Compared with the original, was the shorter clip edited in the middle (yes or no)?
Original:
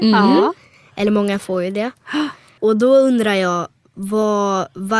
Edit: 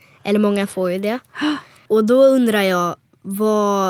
no